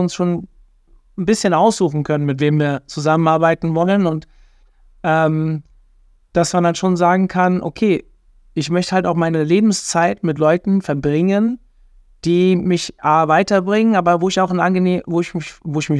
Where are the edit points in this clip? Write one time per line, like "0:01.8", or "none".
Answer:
none

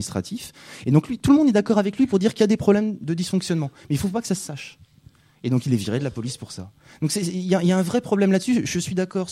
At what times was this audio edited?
none

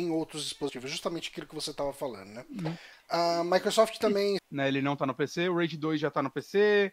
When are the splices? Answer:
0:04.4

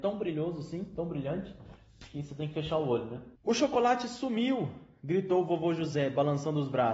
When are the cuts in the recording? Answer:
0:03.4

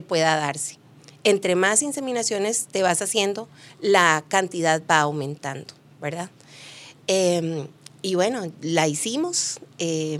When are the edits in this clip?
none

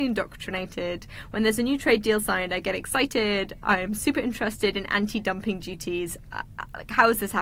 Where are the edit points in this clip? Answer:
none

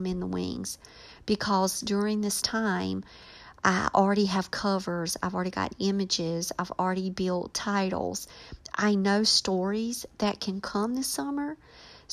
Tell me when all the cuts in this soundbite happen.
none

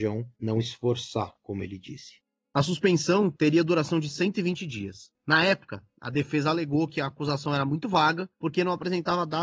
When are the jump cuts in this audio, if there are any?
0:05.1

